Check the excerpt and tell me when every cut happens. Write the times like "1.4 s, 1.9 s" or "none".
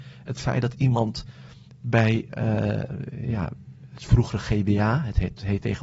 none